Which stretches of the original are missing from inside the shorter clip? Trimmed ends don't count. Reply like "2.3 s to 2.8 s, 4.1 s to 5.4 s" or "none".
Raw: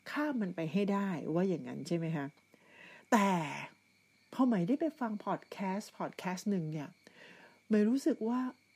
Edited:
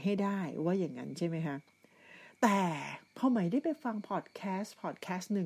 3.8 s to 4.2 s